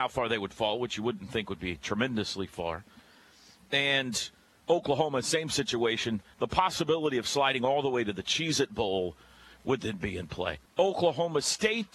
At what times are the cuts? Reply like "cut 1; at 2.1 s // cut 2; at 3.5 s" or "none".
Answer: cut 1; at 6.3 s // cut 2; at 10.7 s